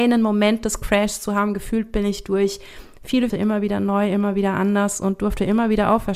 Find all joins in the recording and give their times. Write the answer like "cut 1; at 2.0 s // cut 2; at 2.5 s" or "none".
cut 1; at 3.3 s